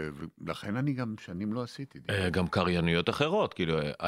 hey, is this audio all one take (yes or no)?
yes